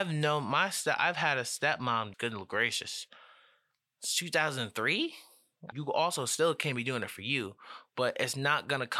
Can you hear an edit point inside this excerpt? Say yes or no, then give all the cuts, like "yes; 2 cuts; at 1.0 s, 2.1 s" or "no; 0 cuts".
yes; 2 cuts; at 2.1 s, 5.7 s